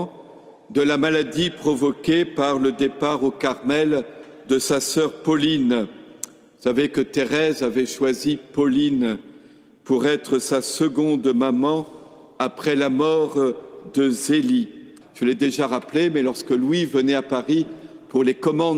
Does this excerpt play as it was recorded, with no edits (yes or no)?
no